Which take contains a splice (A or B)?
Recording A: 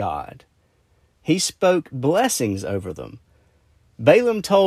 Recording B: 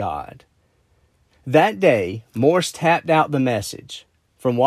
A